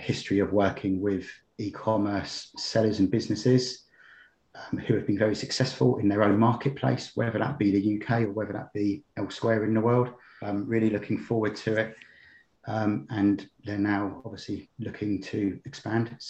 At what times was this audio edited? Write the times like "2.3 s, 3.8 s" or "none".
10.4 s, 12.6 s